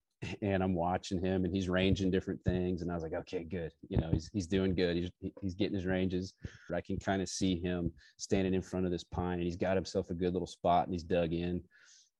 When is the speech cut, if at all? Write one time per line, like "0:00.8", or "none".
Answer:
0:06.7